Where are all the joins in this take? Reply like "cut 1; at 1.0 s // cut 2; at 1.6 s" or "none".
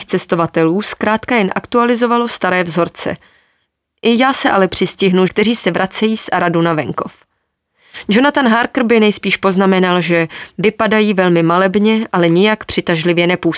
cut 1; at 5.3 s